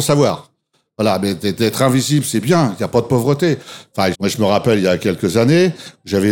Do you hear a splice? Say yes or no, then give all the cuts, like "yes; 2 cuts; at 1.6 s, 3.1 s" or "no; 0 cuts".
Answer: yes; 1 cut; at 4.1 s